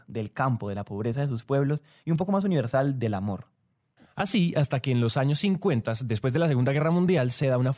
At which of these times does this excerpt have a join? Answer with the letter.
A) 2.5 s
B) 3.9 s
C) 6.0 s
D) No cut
D